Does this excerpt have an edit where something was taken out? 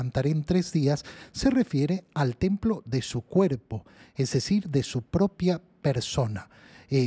no; 0 cuts

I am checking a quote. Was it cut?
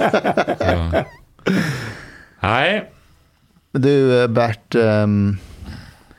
no; 0 cuts

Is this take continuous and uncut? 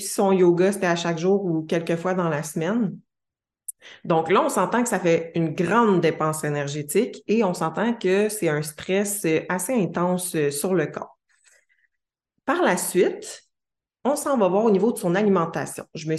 yes; 0 cuts

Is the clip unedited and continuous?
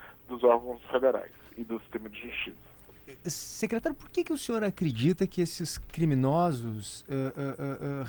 yes; 0 cuts

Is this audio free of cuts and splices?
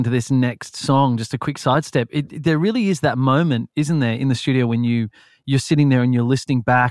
yes; 0 cuts

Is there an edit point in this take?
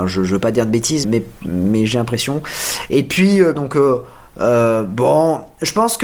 yes; 2 cuts; at 1.0 s, 3.6 s

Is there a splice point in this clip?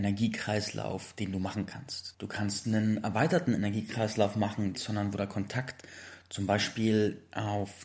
yes; 2 cuts; at 2.1 s, 4.7 s

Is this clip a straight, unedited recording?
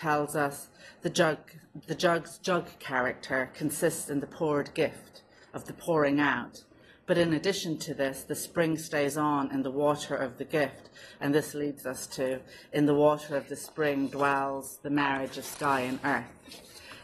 yes; 0 cuts

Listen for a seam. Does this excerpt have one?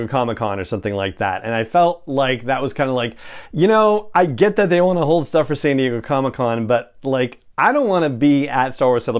no; 0 cuts

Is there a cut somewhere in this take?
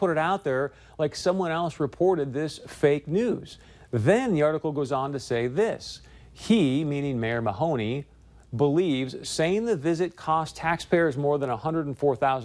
no; 0 cuts

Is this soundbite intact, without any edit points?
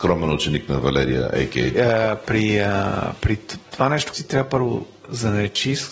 no; 2 cuts; at 1.7 s, 4.1 s

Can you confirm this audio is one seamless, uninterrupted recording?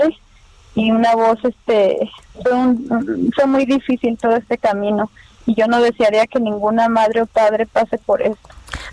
no; 1 cut; at 2.4 s

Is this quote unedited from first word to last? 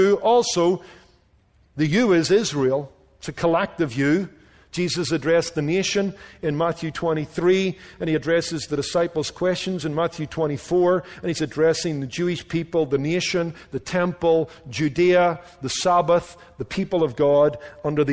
yes; 0 cuts

